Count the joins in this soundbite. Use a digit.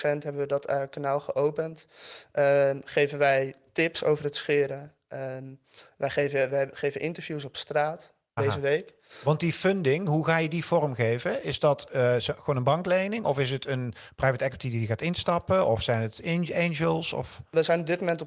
1